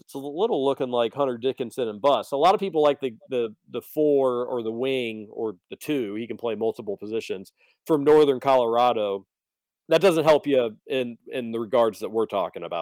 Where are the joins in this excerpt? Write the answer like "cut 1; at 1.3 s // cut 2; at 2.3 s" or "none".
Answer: none

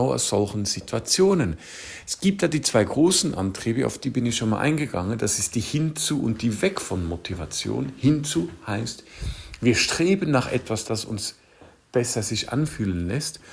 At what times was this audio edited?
cut 1; at 10.8 s

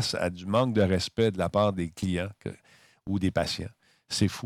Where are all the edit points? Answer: none

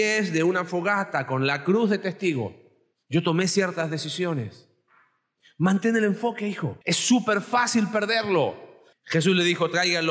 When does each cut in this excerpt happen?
cut 1; at 6.8 s // cut 2; at 8.9 s

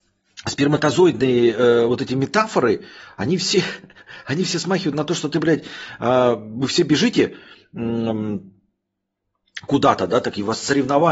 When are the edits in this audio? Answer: none

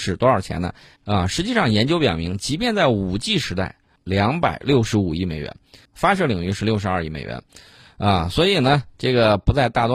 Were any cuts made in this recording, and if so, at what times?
cut 1; at 1.0 s // cut 2; at 4.0 s // cut 3; at 5.9 s

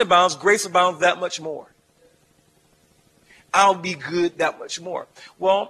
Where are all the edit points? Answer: none

